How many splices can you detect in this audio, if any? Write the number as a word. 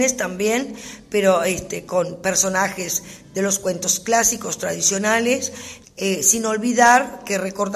one